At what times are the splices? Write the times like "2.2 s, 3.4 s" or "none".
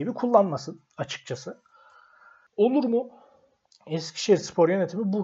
3.6 s

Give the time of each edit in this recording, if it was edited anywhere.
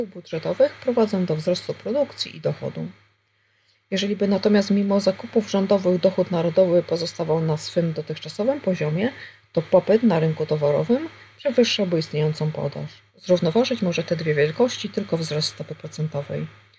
13.1 s

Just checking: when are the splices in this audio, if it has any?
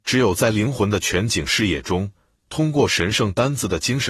none

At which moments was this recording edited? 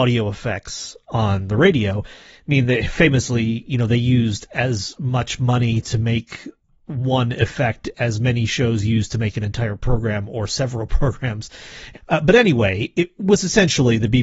11.9 s

